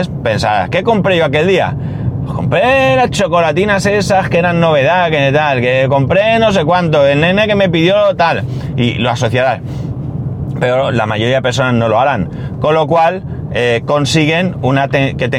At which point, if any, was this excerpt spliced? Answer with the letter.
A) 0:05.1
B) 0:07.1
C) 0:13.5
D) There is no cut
D